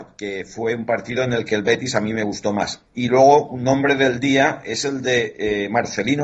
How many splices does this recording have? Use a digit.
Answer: 1